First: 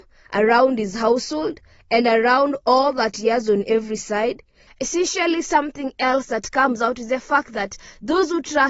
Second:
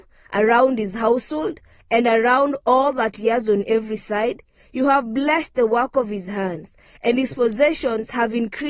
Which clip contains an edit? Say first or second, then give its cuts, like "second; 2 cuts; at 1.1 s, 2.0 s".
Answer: first; 1 cut; at 4.7 s